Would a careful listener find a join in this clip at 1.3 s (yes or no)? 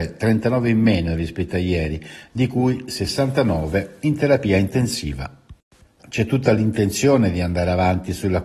no